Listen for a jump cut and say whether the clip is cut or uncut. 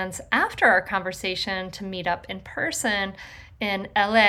uncut